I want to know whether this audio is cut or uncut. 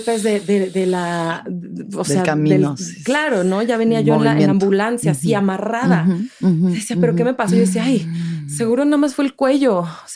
uncut